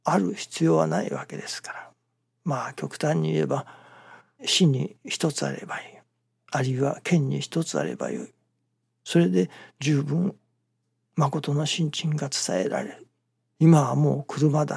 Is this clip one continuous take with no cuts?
no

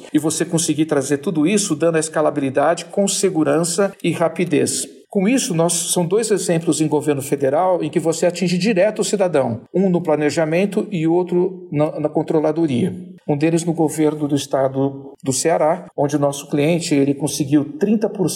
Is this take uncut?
no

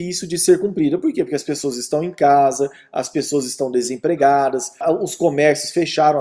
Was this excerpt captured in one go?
no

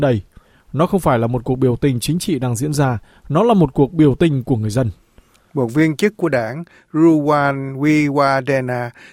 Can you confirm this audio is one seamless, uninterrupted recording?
yes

